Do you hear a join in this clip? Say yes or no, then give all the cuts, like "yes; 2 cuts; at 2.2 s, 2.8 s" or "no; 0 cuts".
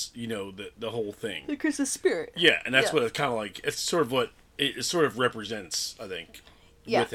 no; 0 cuts